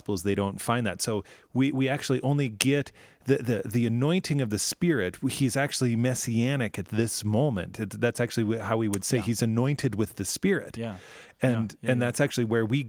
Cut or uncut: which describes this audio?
uncut